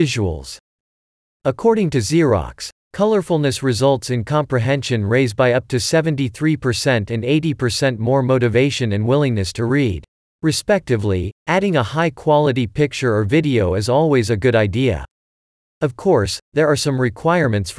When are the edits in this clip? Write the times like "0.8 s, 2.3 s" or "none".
10.2 s